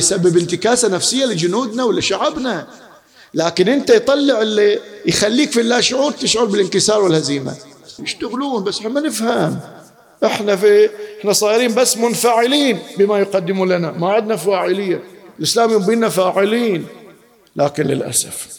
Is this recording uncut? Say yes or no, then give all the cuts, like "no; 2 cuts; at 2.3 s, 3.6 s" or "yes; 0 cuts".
no; 1 cut; at 8.0 s